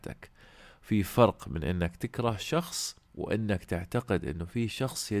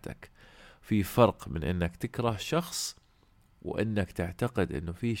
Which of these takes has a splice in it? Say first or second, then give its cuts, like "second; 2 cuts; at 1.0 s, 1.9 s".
first; 1 cut; at 3.0 s